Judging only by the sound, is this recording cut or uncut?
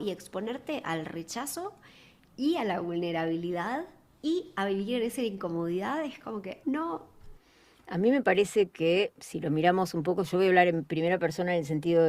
cut